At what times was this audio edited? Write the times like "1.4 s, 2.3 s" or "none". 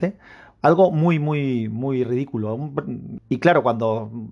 3.2 s